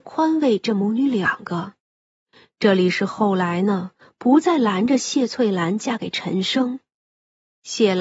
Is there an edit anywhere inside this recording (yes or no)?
no